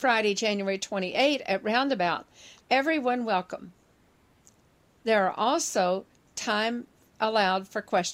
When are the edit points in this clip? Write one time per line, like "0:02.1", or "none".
0:02.6
0:05.0